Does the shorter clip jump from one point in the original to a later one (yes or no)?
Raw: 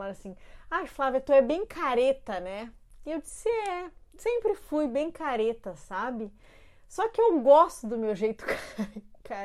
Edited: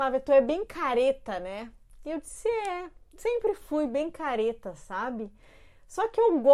no